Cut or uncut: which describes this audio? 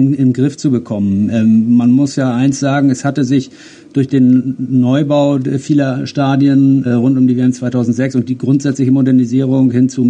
cut